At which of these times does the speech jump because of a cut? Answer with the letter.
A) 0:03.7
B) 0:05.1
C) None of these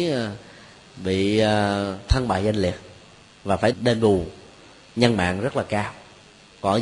A